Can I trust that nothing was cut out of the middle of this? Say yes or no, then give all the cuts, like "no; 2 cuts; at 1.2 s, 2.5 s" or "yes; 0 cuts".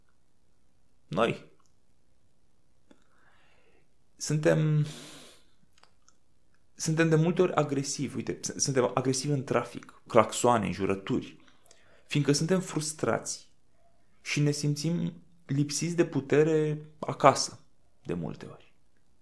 no; 1 cut; at 10.1 s